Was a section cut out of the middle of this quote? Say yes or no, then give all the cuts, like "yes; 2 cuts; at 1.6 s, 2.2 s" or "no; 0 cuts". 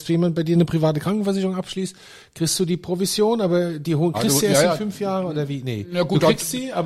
yes; 1 cut; at 4.1 s